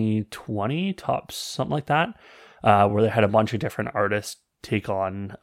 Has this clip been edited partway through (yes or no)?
no